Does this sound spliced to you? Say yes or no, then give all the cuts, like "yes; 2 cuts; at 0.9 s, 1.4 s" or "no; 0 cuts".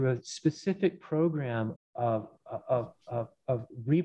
yes; 1 cut; at 1.8 s